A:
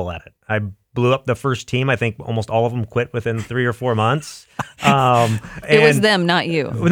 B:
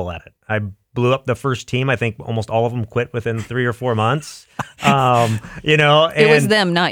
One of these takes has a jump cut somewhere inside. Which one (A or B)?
A